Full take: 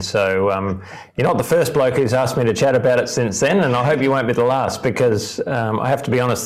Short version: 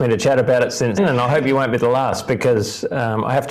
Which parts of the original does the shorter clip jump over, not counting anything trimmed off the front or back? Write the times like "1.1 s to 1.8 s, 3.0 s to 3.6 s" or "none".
3.3 s to 3.5 s

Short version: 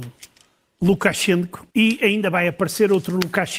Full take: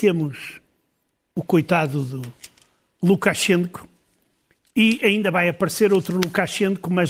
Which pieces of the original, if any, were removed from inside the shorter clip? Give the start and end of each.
3.9 s to 4.7 s

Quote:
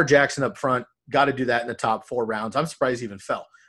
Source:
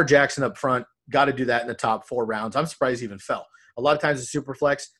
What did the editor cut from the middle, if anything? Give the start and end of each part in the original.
none

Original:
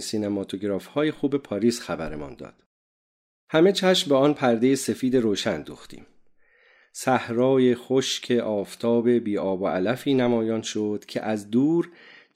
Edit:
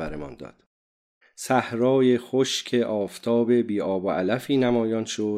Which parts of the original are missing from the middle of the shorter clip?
3.2 s to 6.8 s

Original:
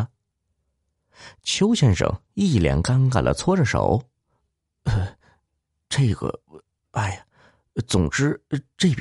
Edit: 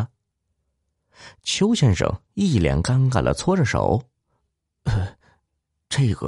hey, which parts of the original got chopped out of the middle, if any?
none

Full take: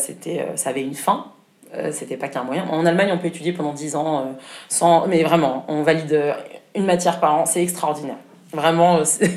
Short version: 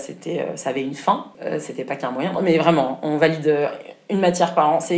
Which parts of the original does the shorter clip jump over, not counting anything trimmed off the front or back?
1.3 s to 1.7 s, 2.7 s to 5.0 s

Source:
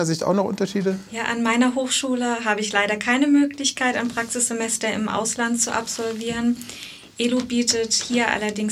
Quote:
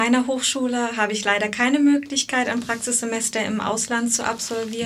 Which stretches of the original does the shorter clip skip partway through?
none

